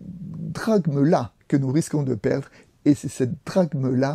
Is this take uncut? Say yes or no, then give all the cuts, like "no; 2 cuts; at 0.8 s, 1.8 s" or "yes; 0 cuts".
no; 1 cut; at 1.4 s